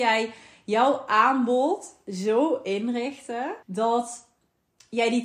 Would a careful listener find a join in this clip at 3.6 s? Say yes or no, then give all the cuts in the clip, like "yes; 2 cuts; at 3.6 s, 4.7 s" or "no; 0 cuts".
yes; 1 cut; at 3.6 s